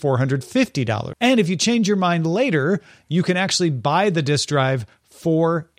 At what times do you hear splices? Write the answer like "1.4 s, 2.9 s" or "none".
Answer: 1.1 s